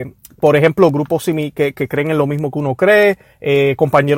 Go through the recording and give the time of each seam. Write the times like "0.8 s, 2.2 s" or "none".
none